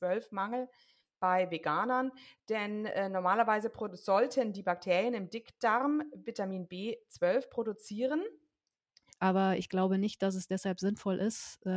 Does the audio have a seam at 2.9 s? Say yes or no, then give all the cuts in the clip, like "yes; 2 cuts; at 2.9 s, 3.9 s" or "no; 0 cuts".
no; 1 cut; at 9.1 s